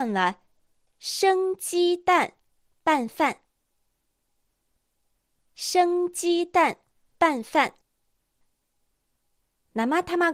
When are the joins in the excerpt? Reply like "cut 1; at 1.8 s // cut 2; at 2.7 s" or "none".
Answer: none